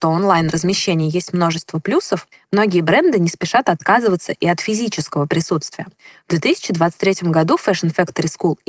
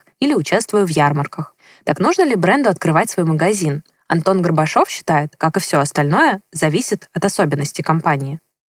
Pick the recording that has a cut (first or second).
second